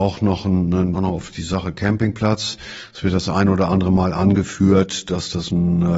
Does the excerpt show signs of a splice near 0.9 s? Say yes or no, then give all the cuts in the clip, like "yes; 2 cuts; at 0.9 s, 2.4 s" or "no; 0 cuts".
yes; 1 cut; at 0.9 s